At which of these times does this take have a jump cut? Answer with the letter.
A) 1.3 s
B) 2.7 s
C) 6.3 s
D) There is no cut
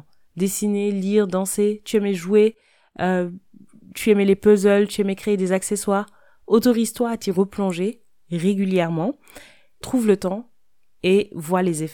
D